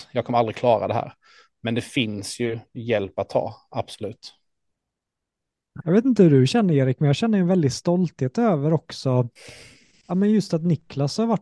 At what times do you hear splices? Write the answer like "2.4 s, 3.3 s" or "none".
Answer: 5.8 s